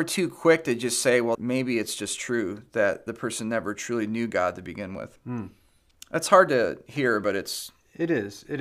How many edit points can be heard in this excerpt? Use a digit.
1